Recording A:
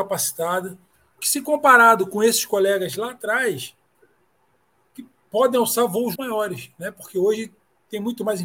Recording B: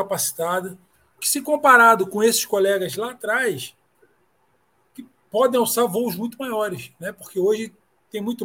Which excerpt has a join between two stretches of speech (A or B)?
A